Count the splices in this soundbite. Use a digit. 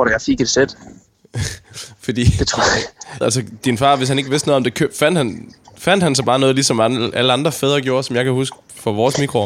1